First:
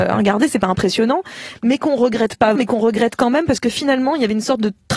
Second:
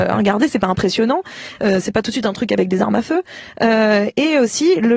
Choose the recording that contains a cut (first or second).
first